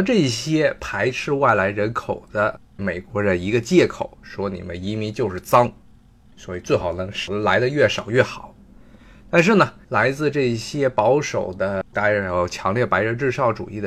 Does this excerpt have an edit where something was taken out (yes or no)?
no